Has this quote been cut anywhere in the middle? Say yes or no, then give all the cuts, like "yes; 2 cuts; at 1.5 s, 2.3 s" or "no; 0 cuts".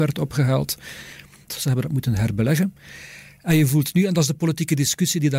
yes; 1 cut; at 1.5 s